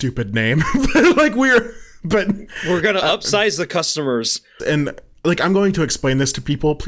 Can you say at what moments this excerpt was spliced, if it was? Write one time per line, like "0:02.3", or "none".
0:04.6